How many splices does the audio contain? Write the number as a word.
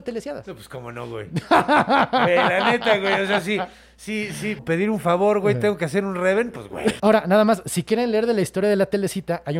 two